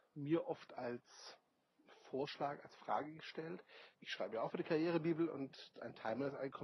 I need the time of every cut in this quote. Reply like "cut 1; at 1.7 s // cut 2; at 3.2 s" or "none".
cut 1; at 3.9 s